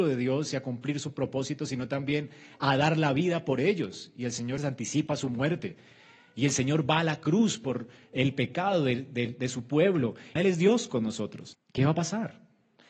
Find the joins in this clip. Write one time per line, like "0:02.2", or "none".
0:04.6
0:10.4
0:11.5